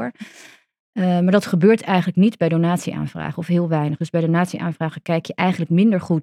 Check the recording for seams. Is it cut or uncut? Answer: uncut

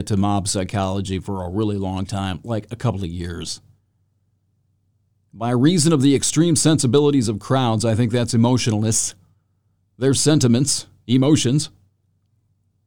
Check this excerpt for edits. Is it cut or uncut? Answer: uncut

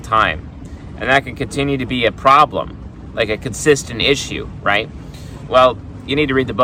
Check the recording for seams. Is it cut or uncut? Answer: cut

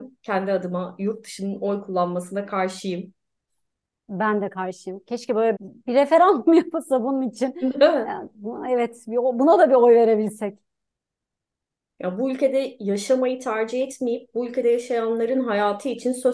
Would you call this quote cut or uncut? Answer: cut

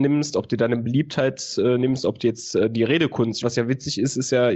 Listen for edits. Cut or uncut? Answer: cut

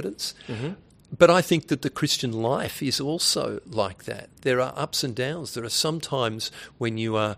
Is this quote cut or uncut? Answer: uncut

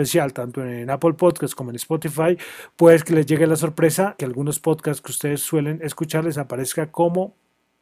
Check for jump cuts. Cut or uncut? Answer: cut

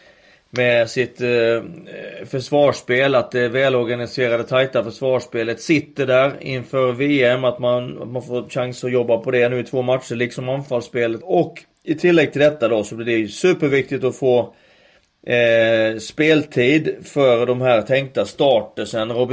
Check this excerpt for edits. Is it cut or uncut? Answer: cut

